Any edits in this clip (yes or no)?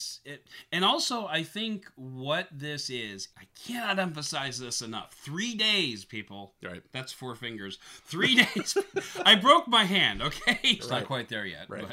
yes